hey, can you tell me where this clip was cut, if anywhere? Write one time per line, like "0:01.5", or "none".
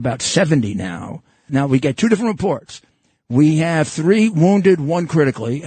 0:01.5